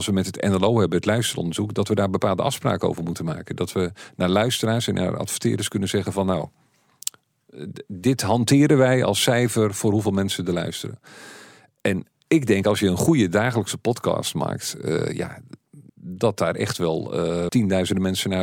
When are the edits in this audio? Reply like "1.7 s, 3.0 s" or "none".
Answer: 15.9 s, 17.5 s

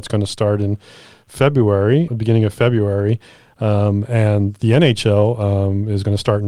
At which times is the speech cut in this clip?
2.1 s

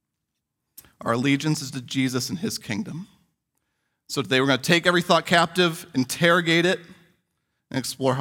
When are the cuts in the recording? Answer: none

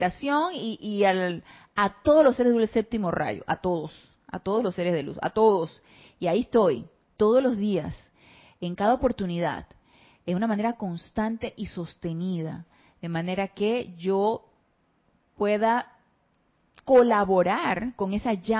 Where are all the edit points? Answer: none

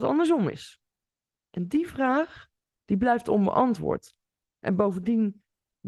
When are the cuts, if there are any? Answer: 4.4 s

